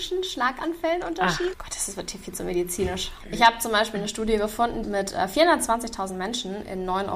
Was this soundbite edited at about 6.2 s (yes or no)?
no